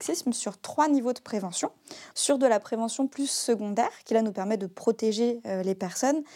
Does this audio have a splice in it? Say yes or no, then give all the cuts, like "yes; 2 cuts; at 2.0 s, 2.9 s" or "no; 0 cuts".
yes; 1 cut; at 2.1 s